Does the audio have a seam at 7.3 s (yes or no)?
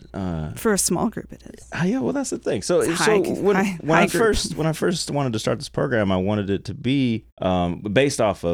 yes